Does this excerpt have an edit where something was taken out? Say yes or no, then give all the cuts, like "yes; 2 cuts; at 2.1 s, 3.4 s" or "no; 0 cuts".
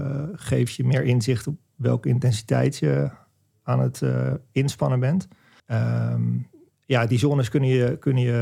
yes; 1 cut; at 5.6 s